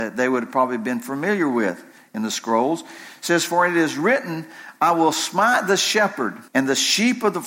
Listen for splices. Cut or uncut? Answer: cut